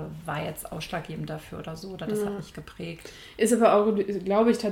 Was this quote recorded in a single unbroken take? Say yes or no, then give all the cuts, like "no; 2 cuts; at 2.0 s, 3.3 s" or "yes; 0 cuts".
yes; 0 cuts